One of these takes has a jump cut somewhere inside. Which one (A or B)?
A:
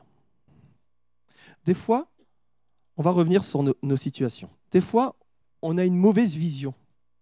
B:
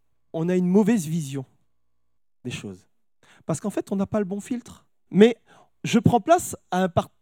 B